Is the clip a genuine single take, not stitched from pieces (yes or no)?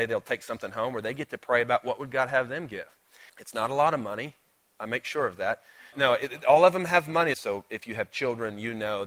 no